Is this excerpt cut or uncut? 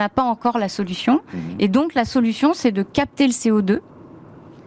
uncut